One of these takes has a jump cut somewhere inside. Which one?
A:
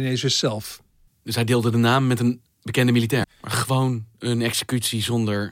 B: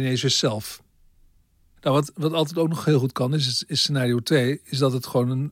A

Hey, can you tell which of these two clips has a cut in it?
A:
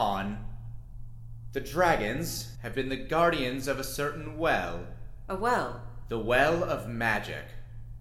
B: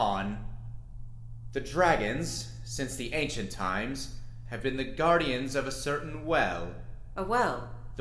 A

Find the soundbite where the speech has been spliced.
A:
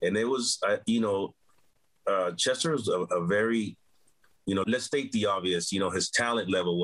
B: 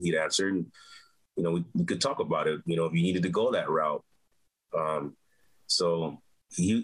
A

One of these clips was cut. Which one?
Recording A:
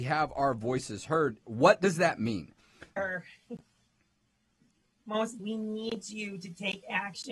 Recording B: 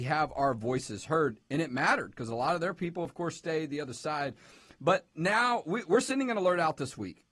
A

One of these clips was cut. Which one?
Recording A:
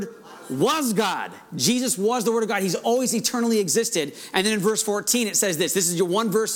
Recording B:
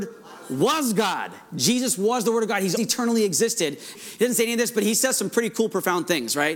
B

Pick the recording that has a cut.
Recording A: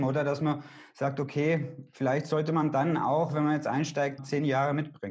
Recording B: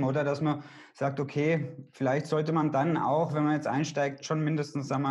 A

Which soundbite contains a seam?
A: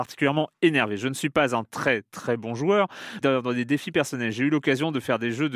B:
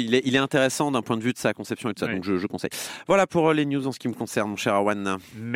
A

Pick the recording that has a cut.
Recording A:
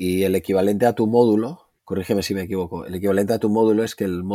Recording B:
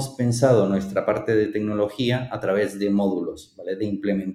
A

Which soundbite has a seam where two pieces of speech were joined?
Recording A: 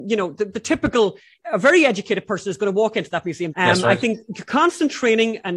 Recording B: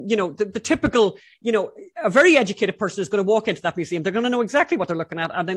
A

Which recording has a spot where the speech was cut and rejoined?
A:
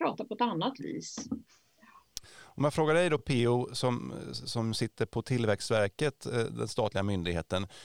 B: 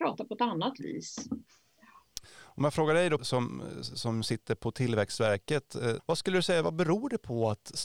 B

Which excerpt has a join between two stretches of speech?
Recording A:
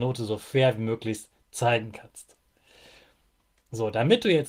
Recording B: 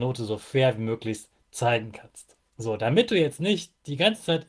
B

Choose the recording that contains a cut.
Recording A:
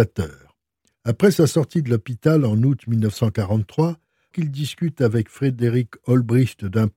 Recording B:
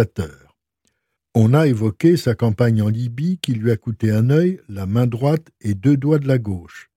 A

